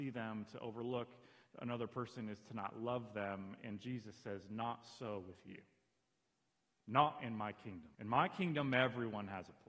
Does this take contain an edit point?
yes; 1 cut; at 7.9 s

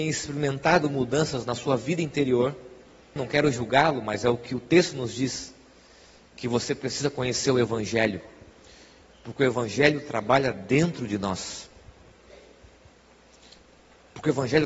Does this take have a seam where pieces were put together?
yes; 1 cut; at 3.2 s

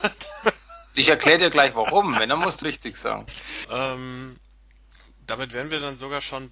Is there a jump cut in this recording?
yes; 2 cuts; at 2.6 s, 3.6 s

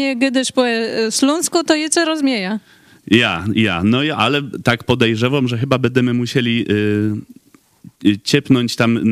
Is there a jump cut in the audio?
no; 0 cuts

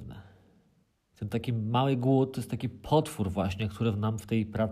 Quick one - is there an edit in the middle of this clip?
yes; 1 cut; at 1.1 s

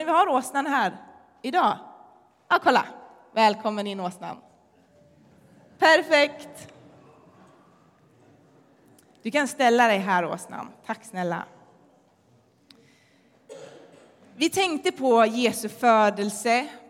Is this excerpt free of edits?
yes; 0 cuts

